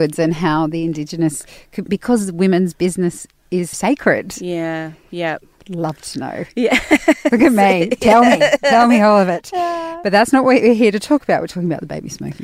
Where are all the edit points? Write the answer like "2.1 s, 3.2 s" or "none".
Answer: 3.7 s